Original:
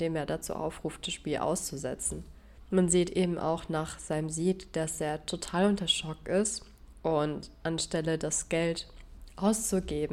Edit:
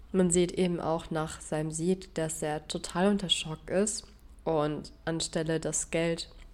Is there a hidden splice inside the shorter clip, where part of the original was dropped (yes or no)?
no